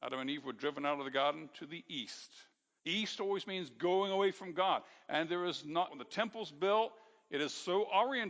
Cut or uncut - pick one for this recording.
cut